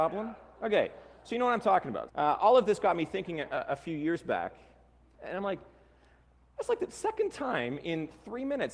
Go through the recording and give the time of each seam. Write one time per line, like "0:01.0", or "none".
0:02.1
0:05.1

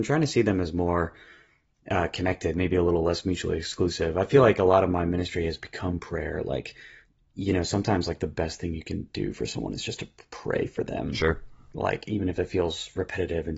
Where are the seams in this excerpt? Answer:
none

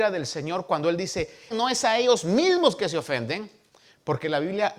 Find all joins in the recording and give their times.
0:01.5

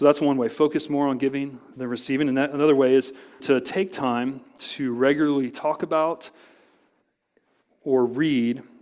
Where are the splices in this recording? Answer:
0:03.4
0:04.6

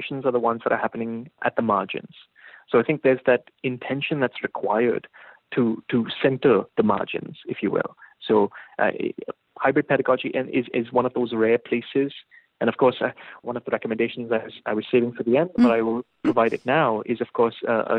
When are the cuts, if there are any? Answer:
none

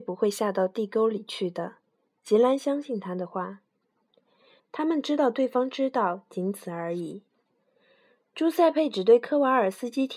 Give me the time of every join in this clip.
0:04.6

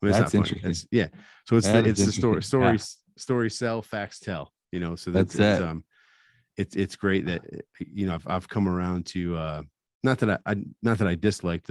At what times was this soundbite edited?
none

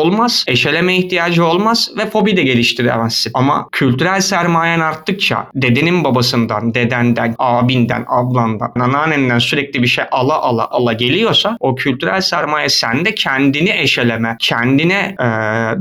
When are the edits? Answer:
0:07.4
0:08.8
0:10.7

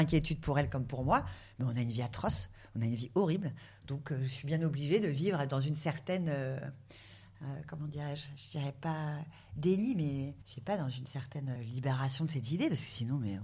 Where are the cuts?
0:10.4
0:11.6

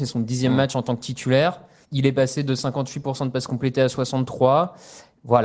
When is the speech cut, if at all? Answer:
0:01.8

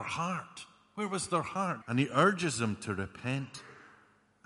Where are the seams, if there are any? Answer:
0:01.8

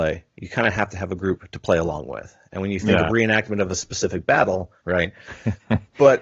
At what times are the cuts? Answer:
0:03.1
0:04.8

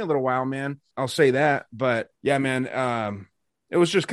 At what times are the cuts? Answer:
0:00.9
0:02.2

